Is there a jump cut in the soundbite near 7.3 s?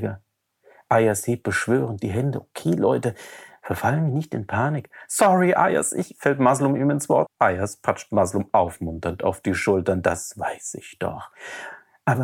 yes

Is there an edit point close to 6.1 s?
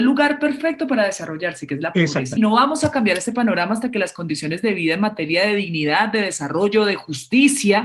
no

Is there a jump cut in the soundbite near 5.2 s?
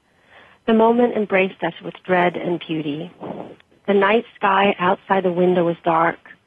no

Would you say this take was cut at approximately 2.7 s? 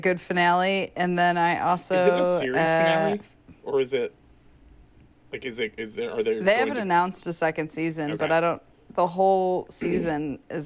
no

